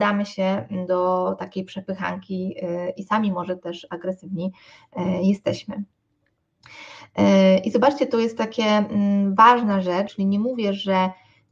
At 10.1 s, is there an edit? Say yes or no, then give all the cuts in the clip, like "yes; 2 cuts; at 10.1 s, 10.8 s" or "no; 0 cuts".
yes; 1 cut; at 10.1 s